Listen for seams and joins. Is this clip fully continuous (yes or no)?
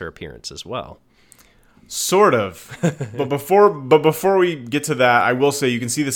yes